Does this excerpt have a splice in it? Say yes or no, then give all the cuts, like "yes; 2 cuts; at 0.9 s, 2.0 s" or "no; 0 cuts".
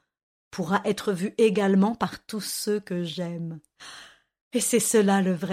no; 0 cuts